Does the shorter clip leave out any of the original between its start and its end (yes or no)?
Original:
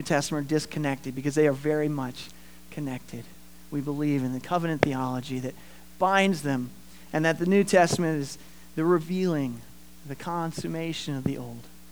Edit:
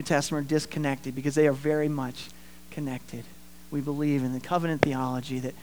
no